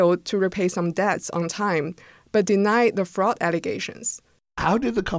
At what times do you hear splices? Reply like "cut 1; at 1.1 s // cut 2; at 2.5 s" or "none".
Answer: none